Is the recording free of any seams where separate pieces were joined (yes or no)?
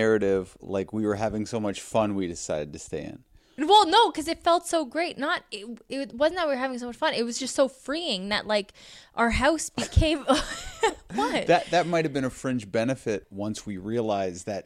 yes